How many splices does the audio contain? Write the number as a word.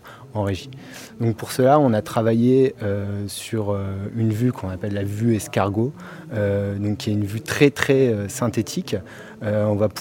zero